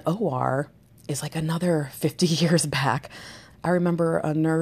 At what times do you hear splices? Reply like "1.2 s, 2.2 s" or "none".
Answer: 3.5 s